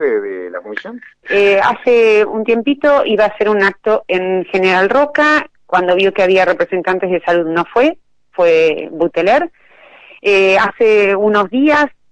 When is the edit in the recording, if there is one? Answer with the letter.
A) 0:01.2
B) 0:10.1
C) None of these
A